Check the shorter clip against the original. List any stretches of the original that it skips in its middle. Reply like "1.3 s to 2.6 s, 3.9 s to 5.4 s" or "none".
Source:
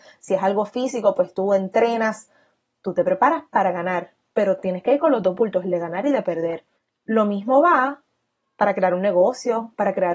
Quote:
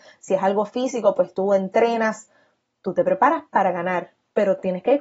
none